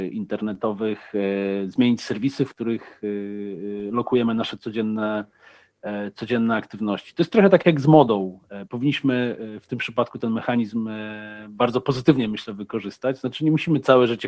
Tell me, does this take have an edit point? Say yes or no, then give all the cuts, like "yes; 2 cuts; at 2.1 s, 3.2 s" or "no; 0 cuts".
no; 0 cuts